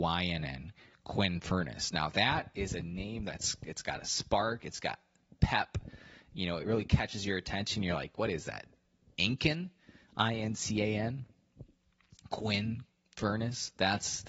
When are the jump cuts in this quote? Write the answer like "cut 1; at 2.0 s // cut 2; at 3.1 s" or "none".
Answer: none

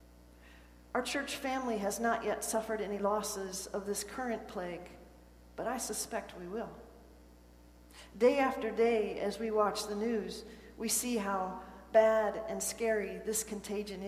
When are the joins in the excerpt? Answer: none

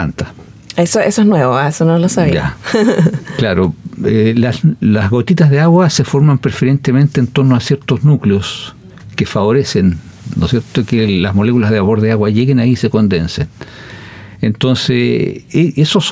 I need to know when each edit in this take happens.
none

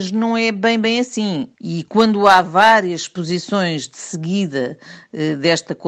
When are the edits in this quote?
cut 1; at 1.6 s

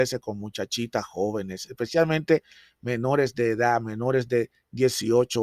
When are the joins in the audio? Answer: none

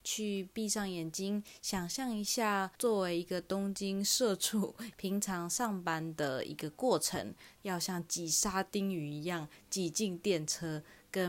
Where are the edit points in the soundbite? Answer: cut 1; at 4.9 s // cut 2; at 7.6 s

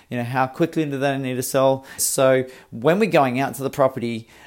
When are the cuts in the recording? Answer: cut 1; at 2.0 s

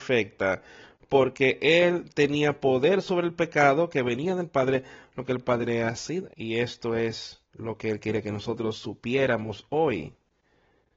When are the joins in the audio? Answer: cut 1; at 6.3 s // cut 2; at 7.5 s

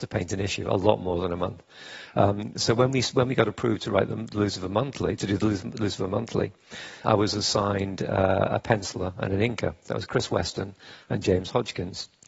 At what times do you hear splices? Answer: cut 1; at 7.0 s

